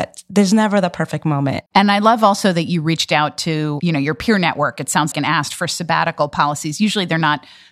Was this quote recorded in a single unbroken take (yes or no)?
no